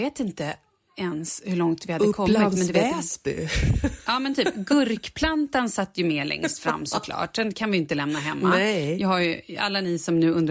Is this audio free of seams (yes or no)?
yes